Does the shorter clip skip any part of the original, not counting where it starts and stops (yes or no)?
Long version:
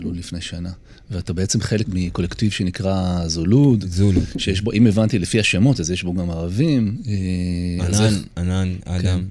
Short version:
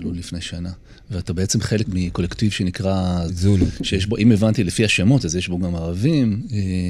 yes